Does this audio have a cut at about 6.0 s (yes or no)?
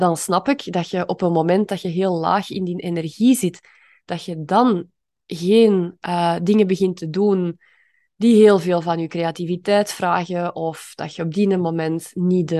no